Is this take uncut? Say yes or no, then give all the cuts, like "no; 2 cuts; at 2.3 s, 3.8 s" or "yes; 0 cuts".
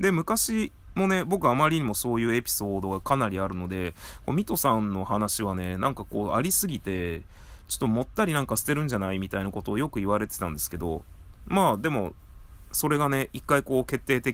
yes; 0 cuts